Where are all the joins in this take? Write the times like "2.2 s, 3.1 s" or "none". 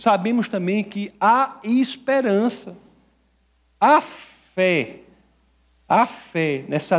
none